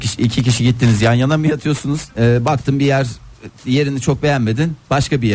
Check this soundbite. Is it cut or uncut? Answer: cut